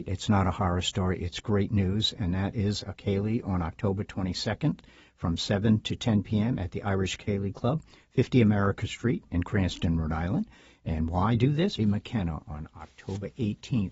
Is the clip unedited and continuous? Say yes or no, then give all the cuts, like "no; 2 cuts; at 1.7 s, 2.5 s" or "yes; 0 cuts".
no; 1 cut; at 11.8 s